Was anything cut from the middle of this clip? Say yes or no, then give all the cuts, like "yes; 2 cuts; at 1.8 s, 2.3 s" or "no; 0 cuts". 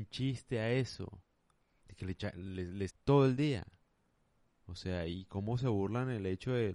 yes; 2 cuts; at 1.8 s, 2.9 s